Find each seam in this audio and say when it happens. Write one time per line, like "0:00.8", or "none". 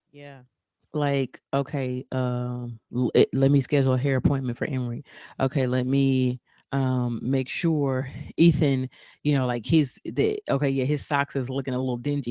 none